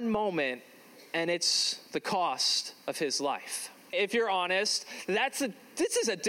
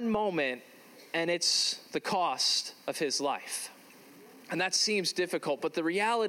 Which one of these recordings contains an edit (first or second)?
first